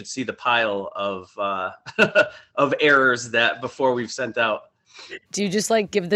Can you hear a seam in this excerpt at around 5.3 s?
yes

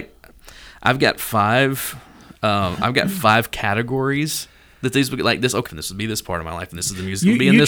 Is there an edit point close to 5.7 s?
yes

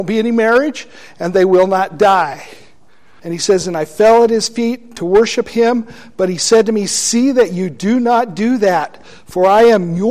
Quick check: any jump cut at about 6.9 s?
no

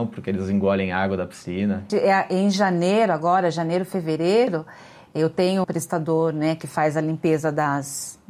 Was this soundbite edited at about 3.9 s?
no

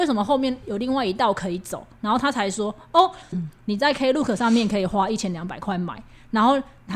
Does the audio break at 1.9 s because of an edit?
no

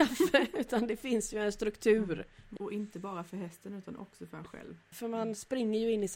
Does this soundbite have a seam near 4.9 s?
yes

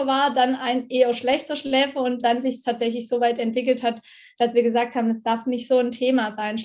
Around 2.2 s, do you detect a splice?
yes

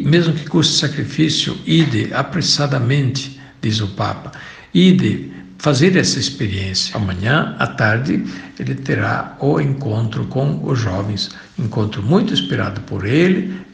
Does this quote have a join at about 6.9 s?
yes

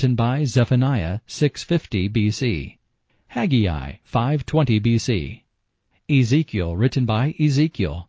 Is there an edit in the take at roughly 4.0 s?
yes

